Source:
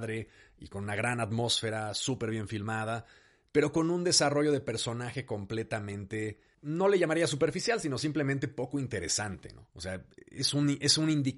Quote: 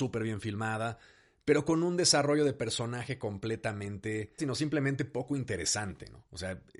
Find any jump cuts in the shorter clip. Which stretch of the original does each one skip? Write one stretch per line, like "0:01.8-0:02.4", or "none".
0:06.5-0:07.8